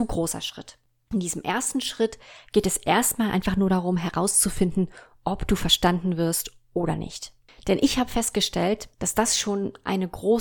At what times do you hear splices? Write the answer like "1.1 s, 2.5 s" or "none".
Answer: 8.9 s

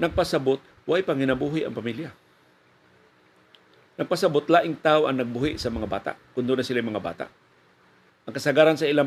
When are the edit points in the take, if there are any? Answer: 8.1 s

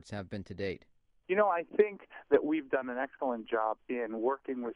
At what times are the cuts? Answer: 3.8 s

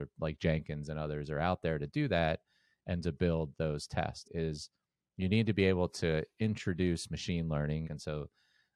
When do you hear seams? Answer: 4.2 s, 7.8 s

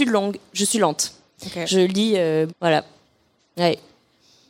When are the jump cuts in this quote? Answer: 2.5 s

